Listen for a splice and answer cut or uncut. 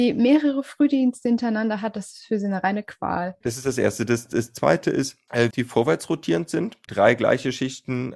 cut